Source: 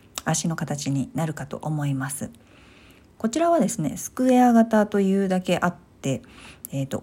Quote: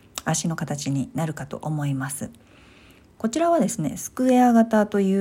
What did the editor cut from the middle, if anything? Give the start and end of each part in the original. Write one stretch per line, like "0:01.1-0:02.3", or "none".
none